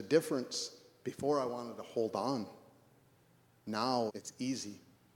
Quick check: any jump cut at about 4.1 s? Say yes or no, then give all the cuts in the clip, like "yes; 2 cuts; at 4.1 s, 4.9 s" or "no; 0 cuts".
yes; 1 cut; at 4.1 s